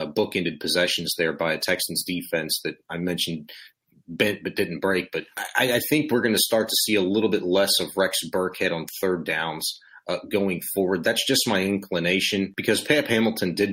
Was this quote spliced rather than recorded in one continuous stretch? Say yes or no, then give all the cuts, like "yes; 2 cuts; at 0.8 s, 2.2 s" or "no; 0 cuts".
no; 0 cuts